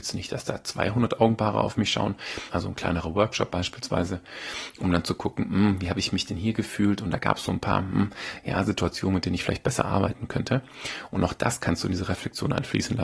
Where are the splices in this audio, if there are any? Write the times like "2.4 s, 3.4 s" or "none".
2.5 s